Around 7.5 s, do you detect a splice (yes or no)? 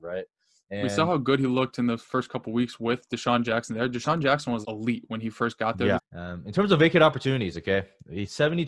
no